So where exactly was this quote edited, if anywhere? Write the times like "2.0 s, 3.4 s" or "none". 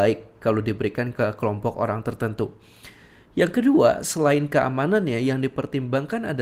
none